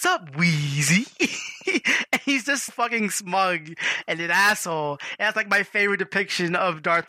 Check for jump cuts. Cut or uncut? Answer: cut